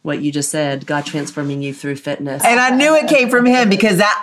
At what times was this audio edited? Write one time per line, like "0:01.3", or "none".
0:02.4